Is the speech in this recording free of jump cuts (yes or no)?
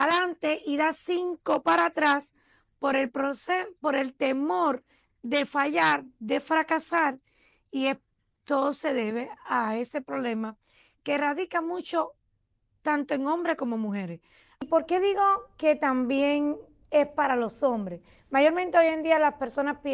yes